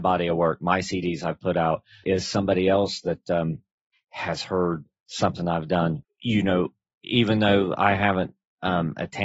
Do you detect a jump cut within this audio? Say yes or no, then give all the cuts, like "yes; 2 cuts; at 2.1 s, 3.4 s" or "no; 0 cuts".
yes; 3 cuts; at 2.0 s, 4.0 s, 6.0 s